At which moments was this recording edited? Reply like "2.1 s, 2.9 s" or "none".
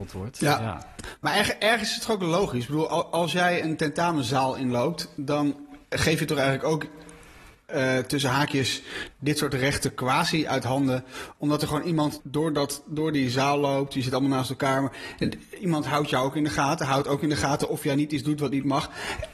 12.2 s